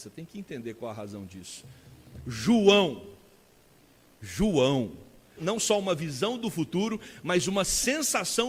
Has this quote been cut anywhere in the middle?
yes; 1 cut; at 5.4 s

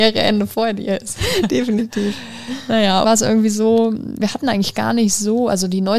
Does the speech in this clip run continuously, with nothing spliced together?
no; 2 cuts; at 3.0 s, 4.2 s

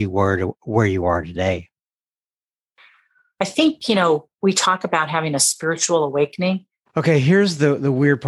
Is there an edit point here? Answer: yes; 2 cuts; at 4.3 s, 6.9 s

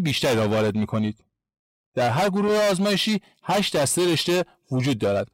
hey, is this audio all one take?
no; 1 cut; at 1.8 s

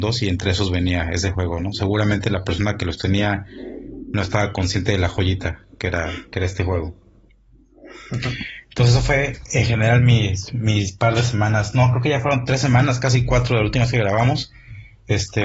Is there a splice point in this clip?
no; 0 cuts

